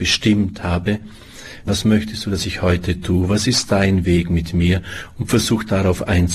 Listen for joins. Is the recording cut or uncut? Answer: cut